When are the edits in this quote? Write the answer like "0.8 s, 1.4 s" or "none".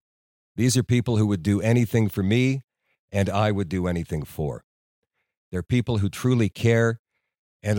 5.4 s